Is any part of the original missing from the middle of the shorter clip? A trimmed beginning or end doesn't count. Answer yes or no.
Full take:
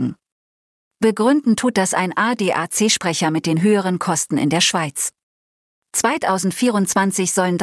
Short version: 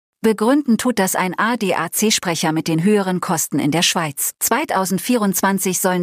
yes